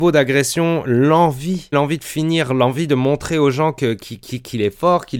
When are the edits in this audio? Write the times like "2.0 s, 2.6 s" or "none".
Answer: 1.7 s